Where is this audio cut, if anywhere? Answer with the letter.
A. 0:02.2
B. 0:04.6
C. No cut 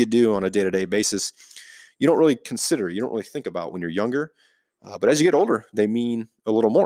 C